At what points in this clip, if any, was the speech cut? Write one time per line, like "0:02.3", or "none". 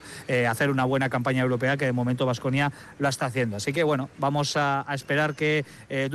none